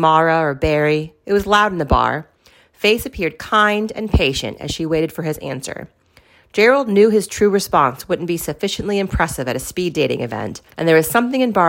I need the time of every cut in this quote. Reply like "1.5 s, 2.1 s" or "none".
10.7 s